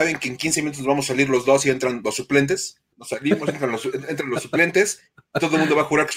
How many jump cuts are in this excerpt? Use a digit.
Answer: 1